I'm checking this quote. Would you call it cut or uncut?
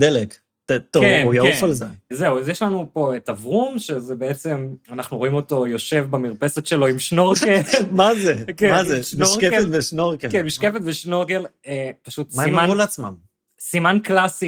cut